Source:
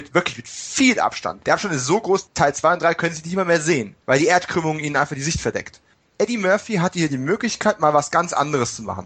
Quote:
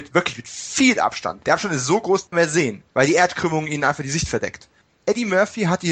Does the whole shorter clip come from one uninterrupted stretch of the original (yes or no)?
no